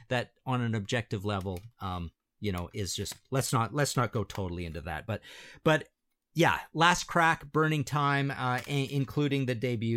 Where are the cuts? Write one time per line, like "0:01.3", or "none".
none